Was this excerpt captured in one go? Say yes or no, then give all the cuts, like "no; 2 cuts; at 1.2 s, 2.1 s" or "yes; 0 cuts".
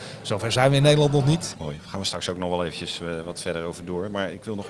no; 1 cut; at 1.5 s